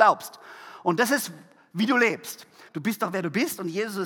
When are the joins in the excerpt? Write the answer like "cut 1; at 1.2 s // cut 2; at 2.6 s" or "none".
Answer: cut 1; at 2.7 s